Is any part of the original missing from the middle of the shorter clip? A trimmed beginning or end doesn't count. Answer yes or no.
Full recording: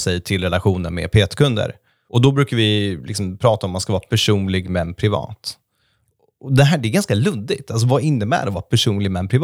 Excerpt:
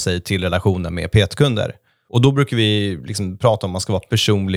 no